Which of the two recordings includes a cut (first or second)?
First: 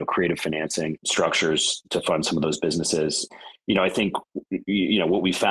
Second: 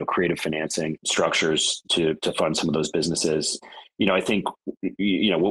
first